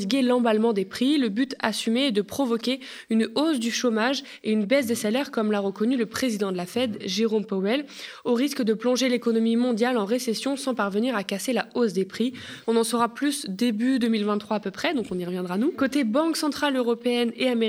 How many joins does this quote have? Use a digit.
1